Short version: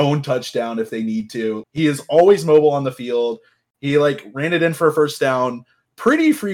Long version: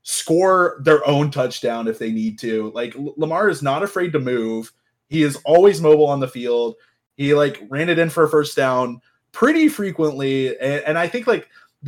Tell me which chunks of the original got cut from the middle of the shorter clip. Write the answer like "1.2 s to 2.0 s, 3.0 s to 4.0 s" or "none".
2.7 s to 5.0 s